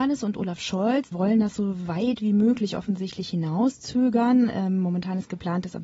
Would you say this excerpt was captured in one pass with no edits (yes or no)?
no